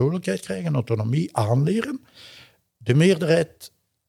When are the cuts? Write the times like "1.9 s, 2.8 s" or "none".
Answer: none